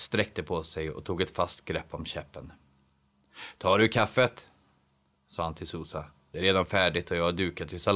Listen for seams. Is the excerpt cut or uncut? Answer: uncut